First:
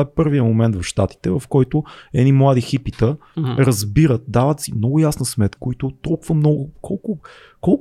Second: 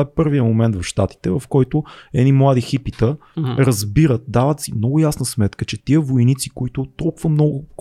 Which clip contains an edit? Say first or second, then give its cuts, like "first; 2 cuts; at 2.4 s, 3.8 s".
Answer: first; 1 cut; at 5.6 s